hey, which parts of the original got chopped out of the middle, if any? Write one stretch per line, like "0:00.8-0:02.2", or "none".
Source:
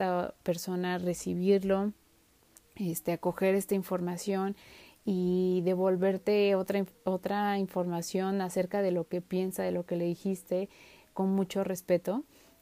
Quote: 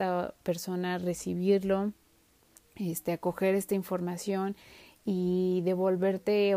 none